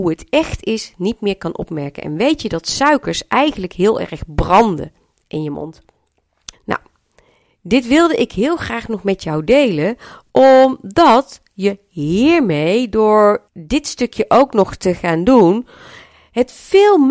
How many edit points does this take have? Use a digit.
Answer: 2